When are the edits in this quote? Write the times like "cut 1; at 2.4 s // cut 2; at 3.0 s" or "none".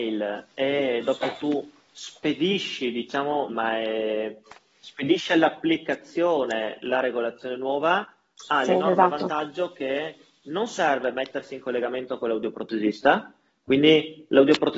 cut 1; at 3.5 s